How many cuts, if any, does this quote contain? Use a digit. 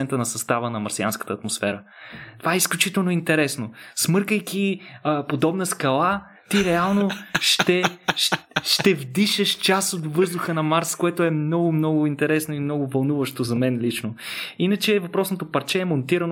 0